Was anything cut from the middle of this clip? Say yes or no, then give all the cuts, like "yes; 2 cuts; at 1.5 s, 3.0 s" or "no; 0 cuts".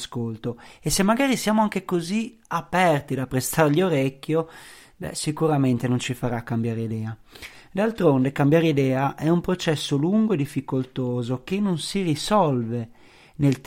no; 0 cuts